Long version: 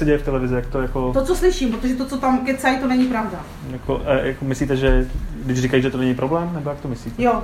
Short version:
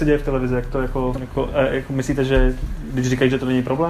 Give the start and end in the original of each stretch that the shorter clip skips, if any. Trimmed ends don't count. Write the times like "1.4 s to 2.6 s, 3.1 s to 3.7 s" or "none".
1.1 s to 3.7 s